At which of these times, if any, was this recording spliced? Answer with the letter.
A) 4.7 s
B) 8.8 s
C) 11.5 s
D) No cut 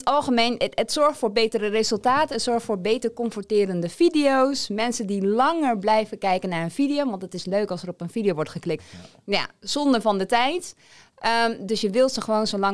B